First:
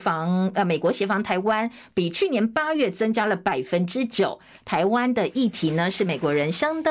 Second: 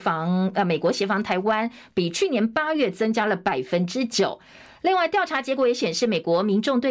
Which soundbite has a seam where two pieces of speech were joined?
first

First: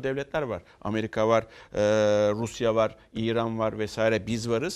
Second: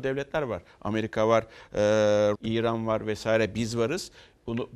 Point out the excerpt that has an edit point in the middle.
second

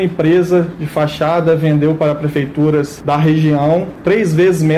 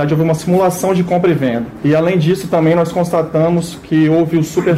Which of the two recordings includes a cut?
second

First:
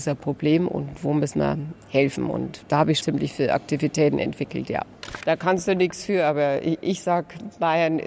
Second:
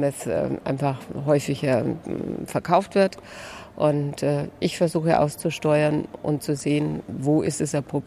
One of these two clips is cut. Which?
first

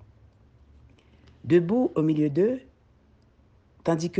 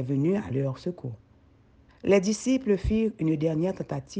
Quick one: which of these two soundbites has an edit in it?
second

